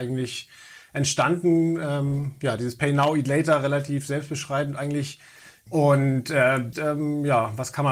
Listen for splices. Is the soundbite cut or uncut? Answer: cut